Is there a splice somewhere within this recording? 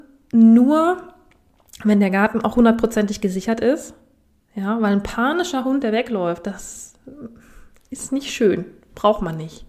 no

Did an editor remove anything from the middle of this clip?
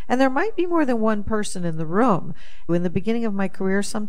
yes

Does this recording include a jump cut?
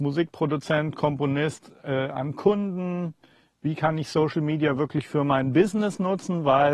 no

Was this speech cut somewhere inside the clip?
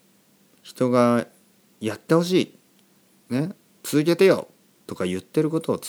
no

